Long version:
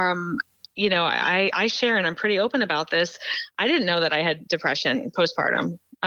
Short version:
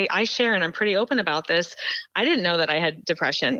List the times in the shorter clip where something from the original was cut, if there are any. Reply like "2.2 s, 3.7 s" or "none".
none

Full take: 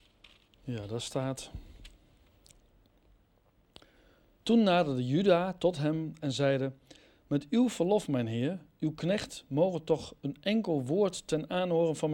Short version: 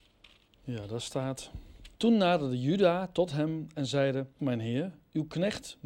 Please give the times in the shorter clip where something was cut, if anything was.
1.9 s, 4.4 s

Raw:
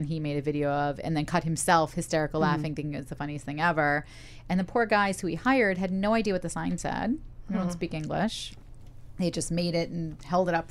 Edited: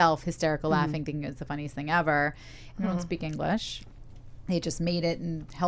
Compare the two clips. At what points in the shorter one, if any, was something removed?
2.7 s

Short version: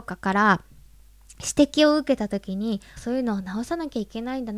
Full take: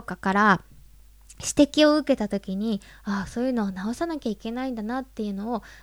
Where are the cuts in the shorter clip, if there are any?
3.0 s

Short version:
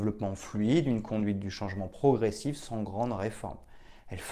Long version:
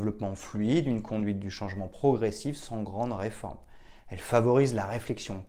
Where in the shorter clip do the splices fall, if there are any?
none

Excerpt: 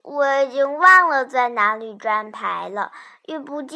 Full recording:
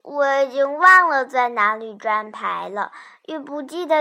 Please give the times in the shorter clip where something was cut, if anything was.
none

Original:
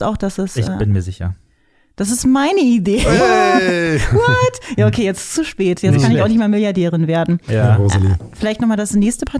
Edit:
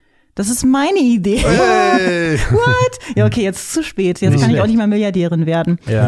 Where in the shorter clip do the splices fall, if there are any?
none

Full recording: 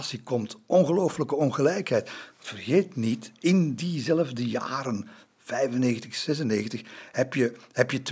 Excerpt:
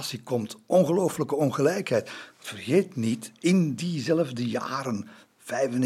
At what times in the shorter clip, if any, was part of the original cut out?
none

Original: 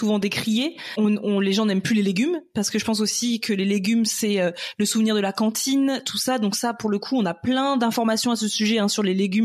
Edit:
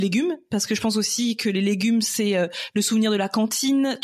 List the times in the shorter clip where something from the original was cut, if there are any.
none

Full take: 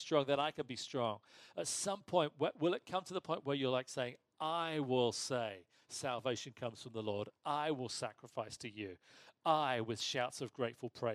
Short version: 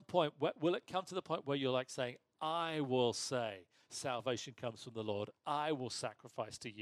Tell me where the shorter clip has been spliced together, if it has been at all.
none

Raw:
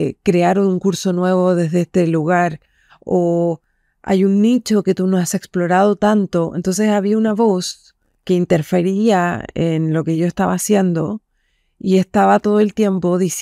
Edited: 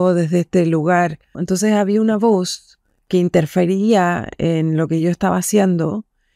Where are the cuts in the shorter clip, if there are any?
1.3 s

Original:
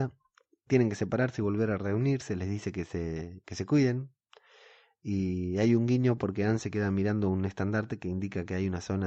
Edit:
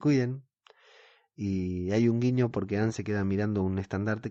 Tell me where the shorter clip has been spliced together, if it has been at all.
none

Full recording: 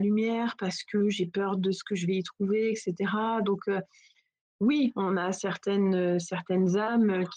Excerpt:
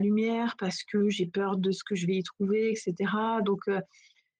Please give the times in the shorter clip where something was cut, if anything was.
none

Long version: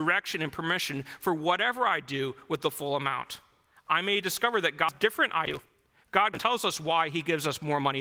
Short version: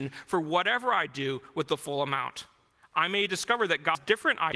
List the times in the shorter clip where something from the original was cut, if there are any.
none

